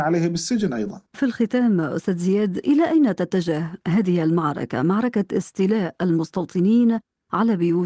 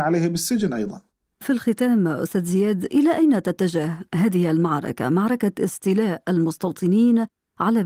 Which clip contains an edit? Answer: first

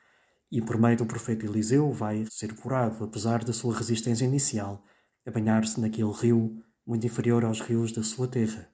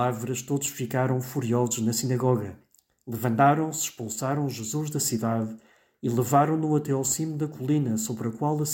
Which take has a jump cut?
first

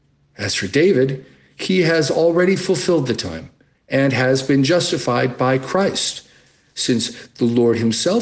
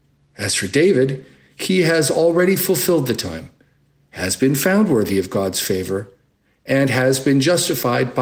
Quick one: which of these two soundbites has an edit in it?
first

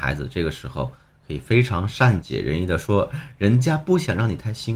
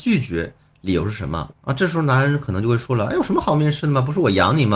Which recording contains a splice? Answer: second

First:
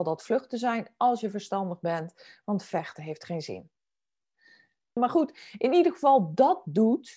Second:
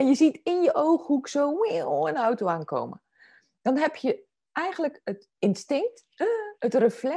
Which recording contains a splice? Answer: first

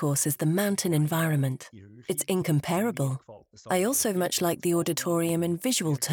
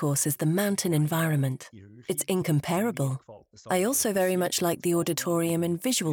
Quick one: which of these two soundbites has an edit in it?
first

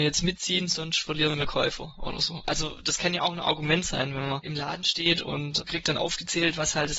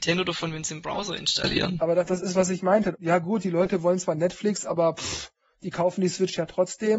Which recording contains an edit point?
second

